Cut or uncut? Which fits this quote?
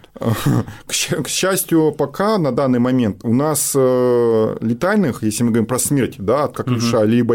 uncut